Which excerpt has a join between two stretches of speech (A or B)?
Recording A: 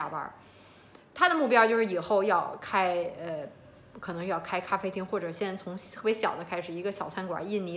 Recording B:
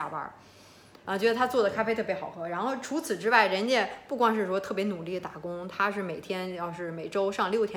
B